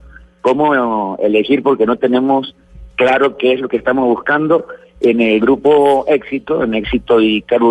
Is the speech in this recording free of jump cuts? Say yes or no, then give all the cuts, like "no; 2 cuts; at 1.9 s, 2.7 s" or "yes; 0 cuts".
yes; 0 cuts